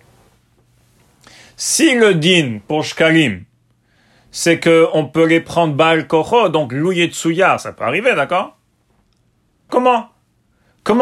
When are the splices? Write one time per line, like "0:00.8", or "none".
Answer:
0:09.7